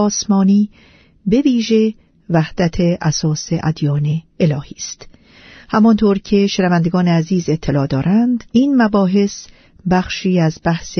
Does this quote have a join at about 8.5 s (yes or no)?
yes